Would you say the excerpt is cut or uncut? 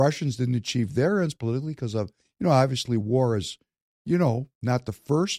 uncut